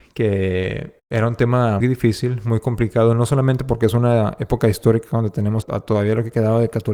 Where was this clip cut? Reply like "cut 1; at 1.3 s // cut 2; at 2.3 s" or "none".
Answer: cut 1; at 1.8 s // cut 2; at 5.6 s